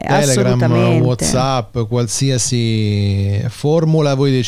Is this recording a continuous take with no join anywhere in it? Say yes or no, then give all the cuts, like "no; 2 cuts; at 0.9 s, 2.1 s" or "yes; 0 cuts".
yes; 0 cuts